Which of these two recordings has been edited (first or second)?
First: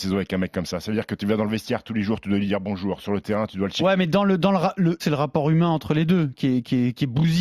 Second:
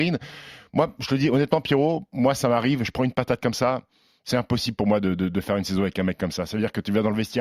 first